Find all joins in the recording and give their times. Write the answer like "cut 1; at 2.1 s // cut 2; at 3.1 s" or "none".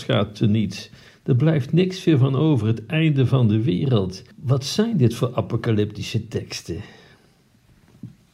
cut 1; at 4.3 s

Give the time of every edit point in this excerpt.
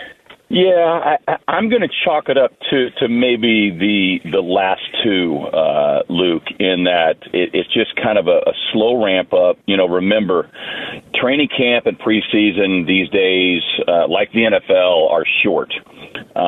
none

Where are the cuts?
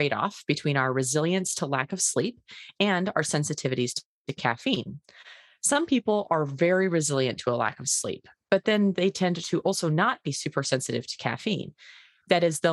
none

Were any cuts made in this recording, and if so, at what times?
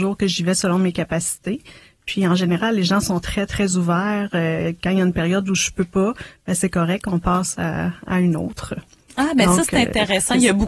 none

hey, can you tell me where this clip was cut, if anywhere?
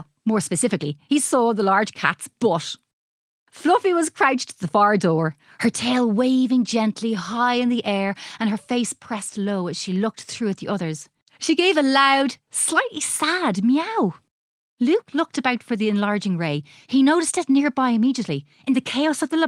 none

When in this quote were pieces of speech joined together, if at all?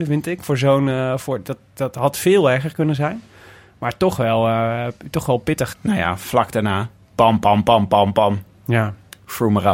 cut 1; at 5.7 s

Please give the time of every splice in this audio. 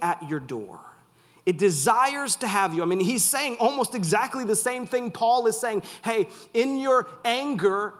none

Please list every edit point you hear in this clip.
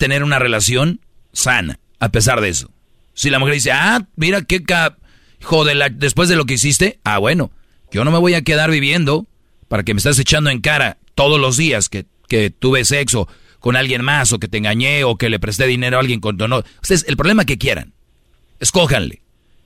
none

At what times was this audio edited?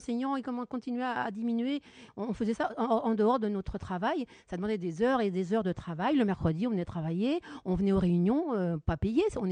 cut 1; at 2.1 s

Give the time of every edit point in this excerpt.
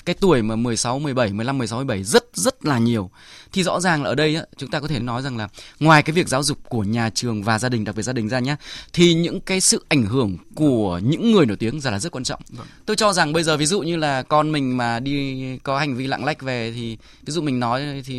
cut 1; at 5.0 s

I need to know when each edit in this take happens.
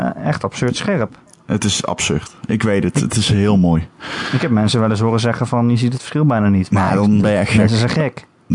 none

